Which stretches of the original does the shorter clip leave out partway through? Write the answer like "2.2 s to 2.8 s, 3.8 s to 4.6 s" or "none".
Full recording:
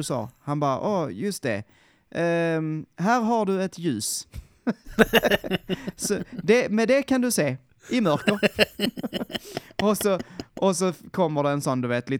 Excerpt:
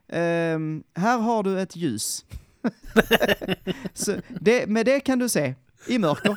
none